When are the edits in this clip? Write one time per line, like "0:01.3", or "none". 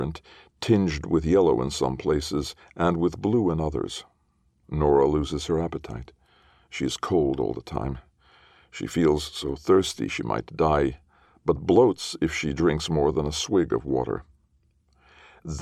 none

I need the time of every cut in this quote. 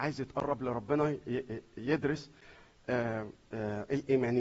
none

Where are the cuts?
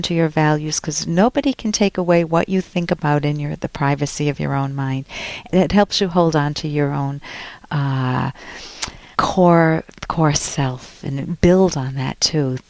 0:05.5
0:09.1

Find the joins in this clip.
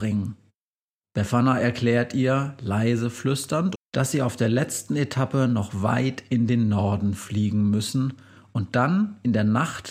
0:03.8

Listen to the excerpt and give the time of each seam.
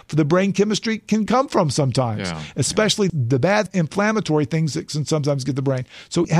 0:01.3

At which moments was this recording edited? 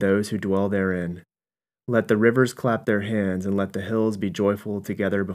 none

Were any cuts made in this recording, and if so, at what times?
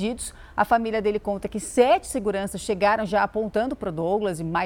none

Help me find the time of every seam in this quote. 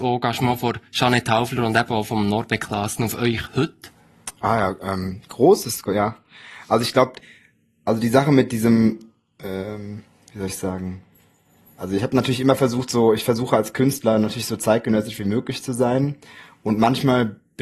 none

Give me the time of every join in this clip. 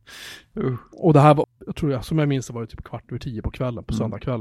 0:01.4

